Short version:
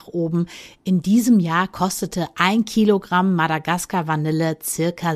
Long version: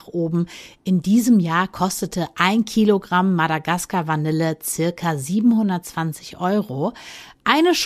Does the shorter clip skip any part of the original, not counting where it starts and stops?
no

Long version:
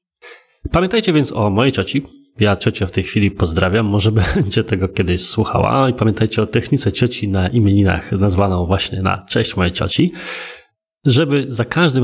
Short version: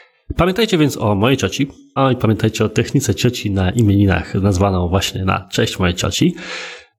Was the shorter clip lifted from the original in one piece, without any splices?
no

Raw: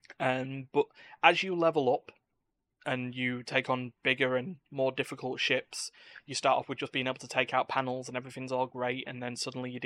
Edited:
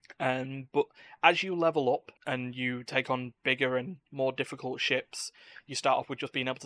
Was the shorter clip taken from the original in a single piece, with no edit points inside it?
no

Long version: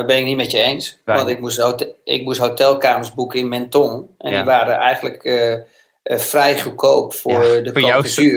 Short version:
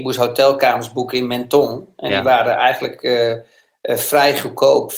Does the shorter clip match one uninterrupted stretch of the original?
yes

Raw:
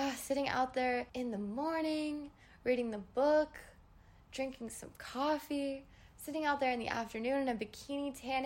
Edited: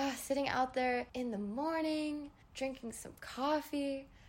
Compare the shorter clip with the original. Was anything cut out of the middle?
yes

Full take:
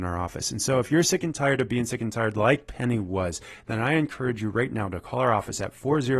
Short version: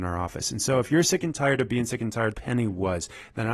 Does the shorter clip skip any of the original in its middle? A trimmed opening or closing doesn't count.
yes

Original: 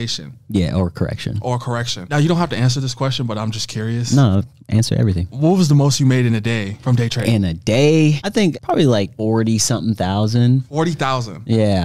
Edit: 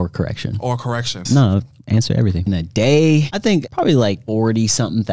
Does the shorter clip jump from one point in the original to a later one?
yes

